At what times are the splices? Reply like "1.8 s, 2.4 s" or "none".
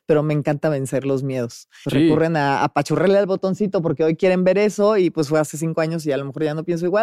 1.8 s

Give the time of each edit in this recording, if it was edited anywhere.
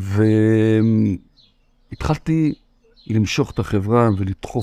none

